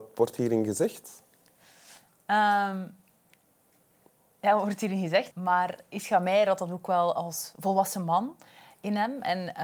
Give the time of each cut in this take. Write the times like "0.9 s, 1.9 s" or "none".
5.3 s